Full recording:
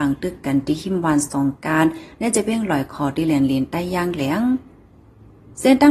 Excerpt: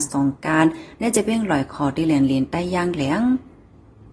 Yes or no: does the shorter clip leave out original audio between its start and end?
no